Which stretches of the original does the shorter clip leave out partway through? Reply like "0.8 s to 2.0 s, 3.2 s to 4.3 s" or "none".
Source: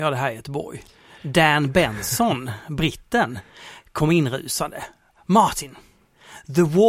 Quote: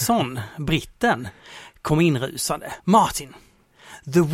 4.9 s to 5.2 s